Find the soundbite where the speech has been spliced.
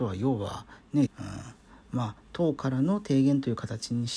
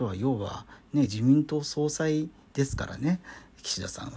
first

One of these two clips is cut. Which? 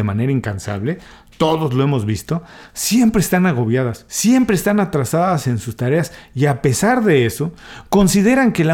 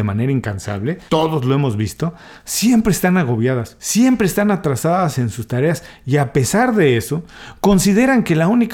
second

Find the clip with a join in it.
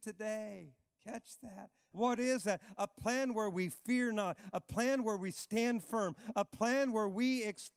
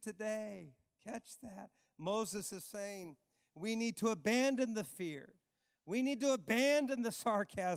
first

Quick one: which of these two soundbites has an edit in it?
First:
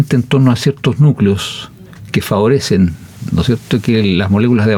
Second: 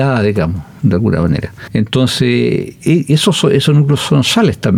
second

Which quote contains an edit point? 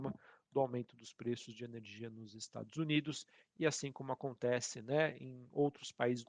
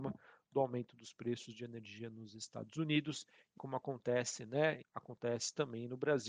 second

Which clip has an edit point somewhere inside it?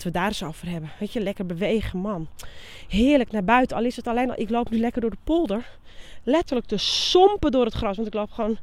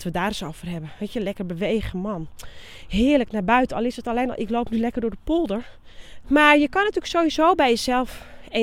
second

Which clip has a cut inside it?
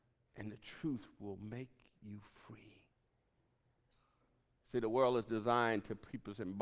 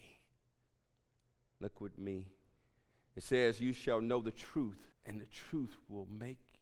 second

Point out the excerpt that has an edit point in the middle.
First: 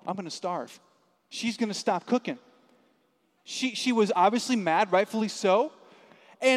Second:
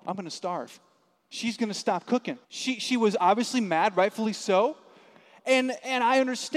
second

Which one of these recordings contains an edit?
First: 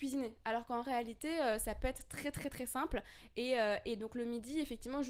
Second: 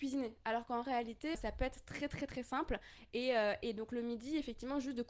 second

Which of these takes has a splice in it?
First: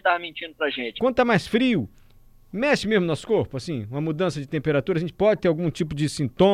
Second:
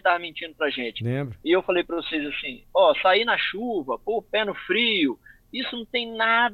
first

